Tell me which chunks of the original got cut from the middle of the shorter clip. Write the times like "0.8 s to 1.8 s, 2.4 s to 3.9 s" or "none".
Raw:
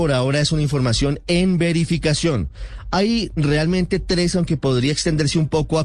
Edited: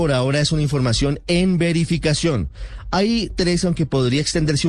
3.3 s to 4.0 s